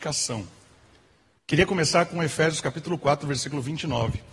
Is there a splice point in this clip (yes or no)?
yes